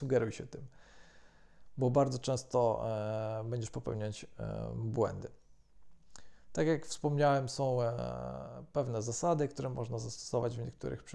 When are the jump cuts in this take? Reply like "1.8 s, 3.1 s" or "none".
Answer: none